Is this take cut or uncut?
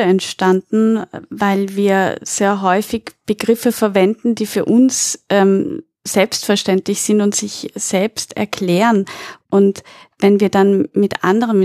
uncut